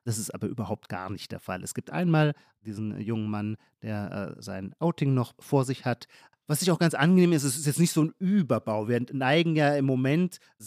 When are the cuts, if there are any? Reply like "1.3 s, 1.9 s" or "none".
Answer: 6.3 s